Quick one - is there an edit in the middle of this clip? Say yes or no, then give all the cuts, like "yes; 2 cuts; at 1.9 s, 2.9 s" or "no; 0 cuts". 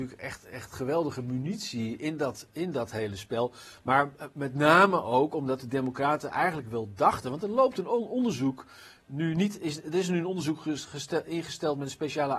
no; 0 cuts